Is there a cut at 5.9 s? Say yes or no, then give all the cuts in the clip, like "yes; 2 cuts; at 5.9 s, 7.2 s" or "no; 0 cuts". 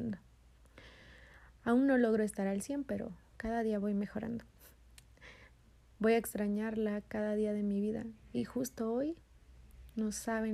no; 0 cuts